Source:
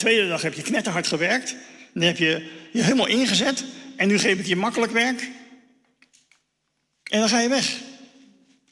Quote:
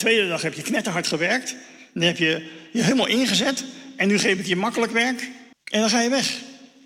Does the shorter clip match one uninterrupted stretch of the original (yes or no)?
no